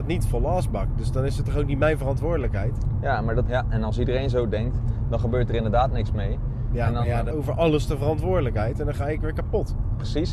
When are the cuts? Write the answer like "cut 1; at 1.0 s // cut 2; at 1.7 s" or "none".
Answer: cut 1; at 3.5 s // cut 2; at 7.3 s